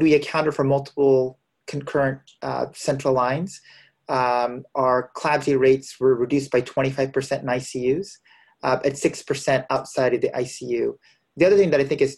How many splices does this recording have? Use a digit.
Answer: 0